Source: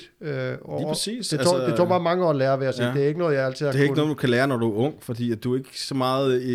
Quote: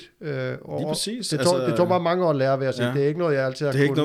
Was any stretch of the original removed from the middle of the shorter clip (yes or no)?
no